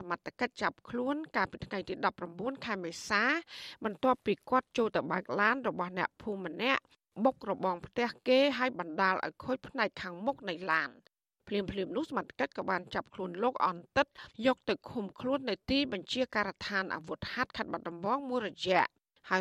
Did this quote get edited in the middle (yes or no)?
no